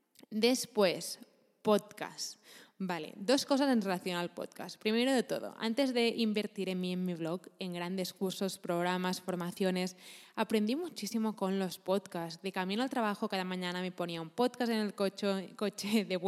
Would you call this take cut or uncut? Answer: uncut